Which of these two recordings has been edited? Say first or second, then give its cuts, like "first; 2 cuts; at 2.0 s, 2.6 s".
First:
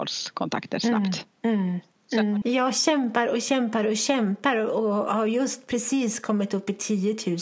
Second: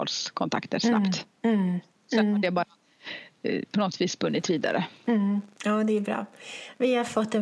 first; 1 cut; at 2.4 s